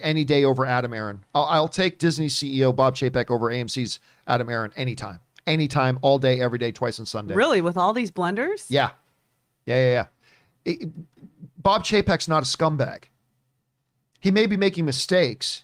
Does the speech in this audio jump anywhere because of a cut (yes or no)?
no